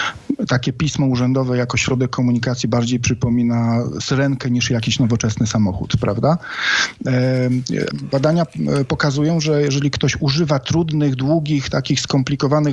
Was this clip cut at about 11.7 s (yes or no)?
no